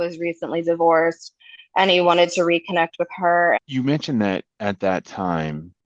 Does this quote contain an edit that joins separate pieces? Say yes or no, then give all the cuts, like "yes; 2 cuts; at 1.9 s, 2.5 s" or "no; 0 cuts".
yes; 1 cut; at 3.6 s